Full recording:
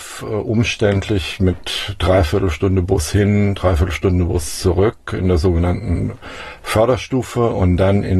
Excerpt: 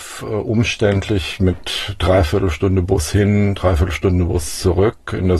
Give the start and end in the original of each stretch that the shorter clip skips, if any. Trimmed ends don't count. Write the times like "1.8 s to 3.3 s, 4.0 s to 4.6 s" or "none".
none